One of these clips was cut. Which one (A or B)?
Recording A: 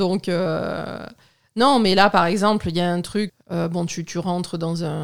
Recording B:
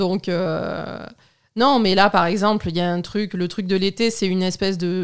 A